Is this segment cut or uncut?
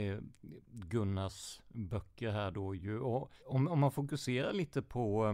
cut